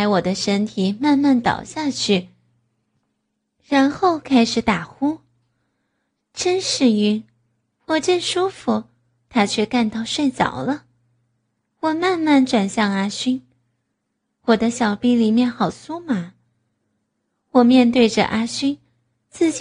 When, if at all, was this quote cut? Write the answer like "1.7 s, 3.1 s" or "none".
none